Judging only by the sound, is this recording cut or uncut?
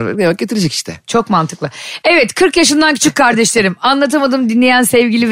uncut